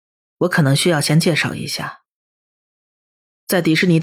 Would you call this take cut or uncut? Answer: uncut